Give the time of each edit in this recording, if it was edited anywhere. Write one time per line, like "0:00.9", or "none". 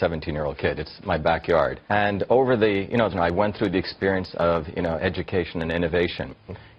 0:01.9
0:03.1
0:05.0